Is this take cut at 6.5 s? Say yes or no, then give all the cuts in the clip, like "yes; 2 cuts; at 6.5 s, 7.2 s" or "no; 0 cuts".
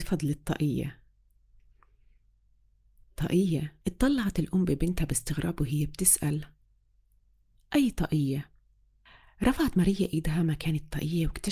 no; 1 cut; at 3.8 s